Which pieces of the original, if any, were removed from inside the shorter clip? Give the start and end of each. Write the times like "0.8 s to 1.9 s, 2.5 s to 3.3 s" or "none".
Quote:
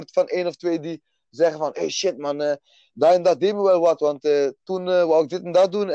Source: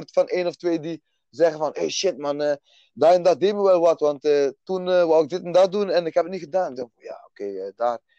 none